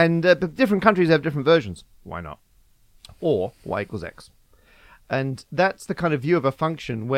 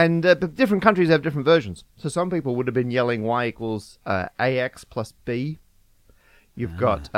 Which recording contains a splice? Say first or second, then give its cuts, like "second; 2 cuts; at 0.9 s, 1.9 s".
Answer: first; 1 cut; at 1.9 s